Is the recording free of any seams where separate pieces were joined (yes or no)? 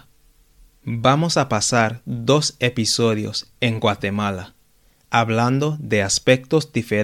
yes